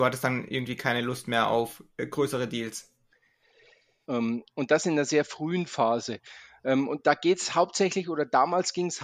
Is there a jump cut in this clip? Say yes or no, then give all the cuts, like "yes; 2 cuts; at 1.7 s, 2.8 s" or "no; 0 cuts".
yes; 1 cut; at 4.1 s